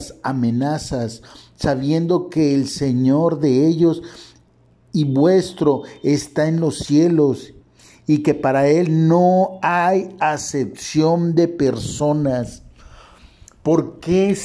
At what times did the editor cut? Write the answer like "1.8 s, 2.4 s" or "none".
none